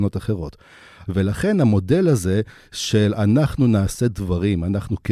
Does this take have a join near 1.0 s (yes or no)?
yes